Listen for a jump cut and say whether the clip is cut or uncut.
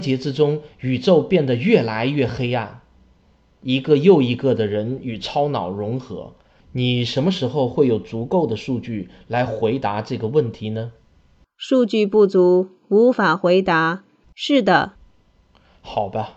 cut